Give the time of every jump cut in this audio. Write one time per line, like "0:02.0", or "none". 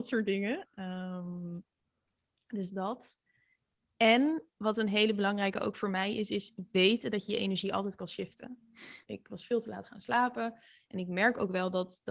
0:09.0